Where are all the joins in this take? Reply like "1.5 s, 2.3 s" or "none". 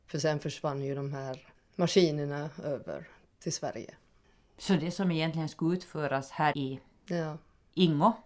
6.5 s